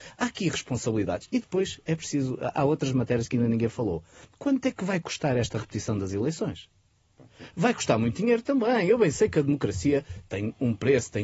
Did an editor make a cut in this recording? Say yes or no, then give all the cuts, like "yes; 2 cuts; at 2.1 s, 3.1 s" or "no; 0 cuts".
no; 0 cuts